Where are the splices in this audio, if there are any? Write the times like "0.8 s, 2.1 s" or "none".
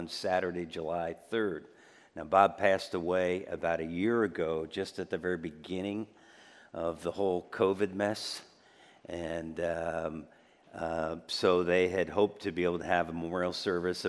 none